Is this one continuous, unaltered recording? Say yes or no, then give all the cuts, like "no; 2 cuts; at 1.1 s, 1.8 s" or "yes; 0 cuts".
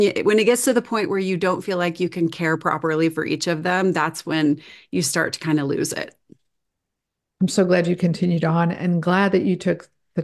yes; 0 cuts